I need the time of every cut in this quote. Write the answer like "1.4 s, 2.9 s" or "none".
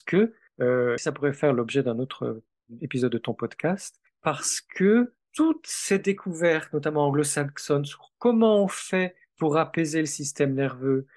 1.0 s